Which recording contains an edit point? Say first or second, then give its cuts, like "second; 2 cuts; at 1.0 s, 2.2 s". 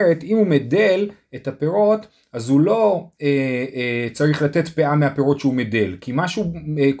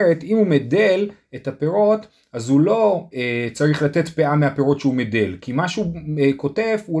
second; 1 cut; at 3.1 s